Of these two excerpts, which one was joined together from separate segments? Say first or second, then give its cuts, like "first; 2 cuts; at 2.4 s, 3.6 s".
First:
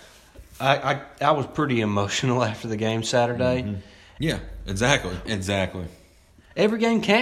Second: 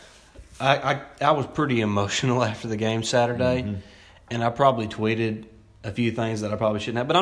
first; 2 cuts; at 4.2 s, 5.3 s